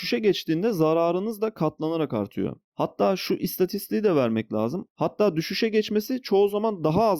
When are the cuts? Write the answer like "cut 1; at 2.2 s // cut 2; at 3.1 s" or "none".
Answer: cut 1; at 2.7 s // cut 2; at 4.9 s